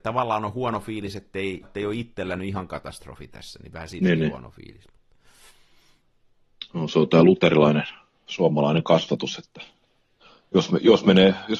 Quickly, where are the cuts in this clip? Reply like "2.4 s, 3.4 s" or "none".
1.6 s